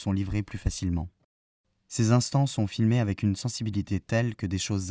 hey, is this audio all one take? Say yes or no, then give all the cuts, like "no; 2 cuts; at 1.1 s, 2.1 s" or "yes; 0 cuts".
yes; 0 cuts